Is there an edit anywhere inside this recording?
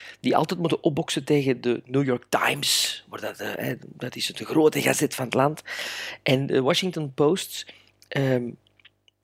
no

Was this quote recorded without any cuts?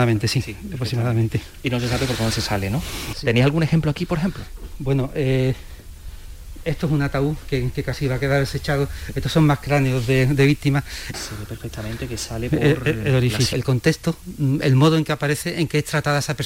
no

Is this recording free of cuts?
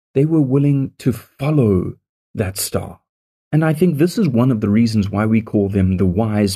yes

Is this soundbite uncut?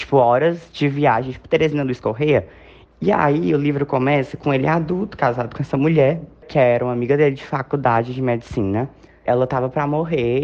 no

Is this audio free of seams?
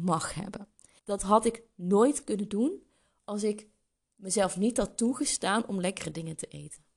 no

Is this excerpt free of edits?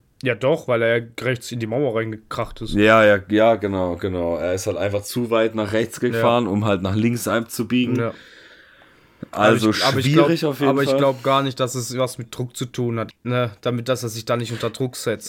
no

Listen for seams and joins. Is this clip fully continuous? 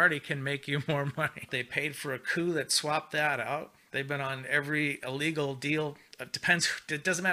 no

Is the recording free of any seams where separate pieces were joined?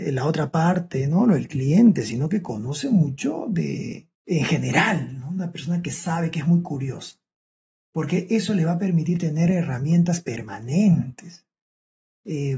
no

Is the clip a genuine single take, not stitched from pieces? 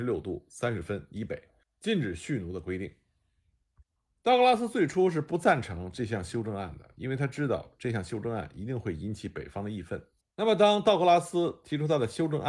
no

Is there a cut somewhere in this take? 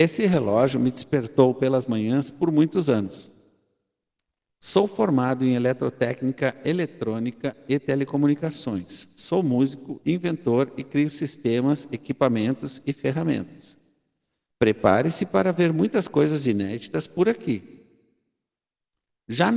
no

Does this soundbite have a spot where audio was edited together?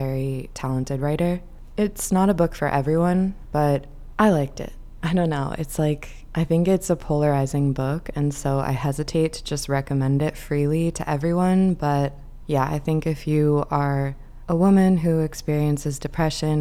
yes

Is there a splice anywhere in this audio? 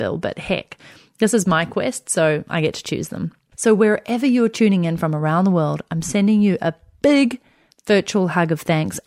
yes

